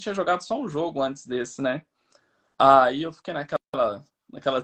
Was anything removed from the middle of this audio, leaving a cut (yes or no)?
no